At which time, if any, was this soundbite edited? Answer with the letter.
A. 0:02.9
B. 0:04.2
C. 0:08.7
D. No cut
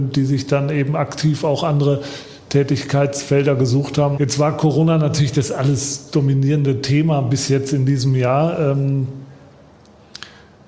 B